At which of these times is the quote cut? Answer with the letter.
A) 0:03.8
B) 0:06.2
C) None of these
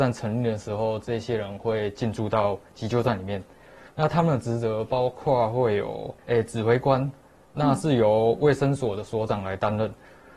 B